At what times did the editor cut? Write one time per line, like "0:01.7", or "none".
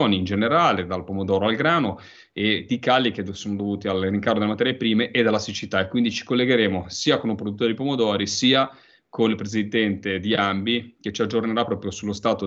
none